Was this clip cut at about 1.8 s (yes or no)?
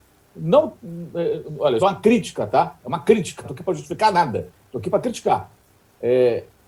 yes